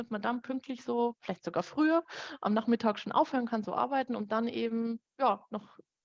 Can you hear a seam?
no; 0 cuts

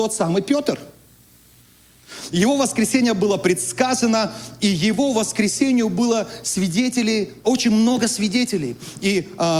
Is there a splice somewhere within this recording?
yes; 1 cut; at 2.3 s

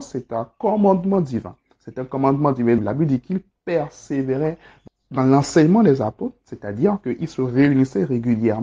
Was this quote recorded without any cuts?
no; 2 cuts; at 2.8 s, 4.9 s

